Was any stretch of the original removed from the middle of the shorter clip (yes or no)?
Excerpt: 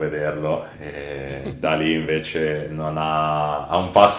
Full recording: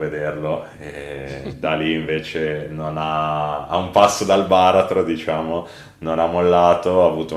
no